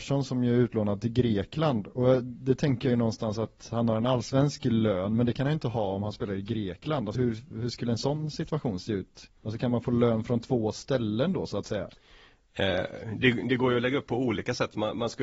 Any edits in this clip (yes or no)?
yes